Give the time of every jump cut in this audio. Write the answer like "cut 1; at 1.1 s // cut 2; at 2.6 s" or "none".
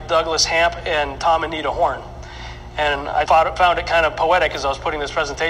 cut 1; at 3.3 s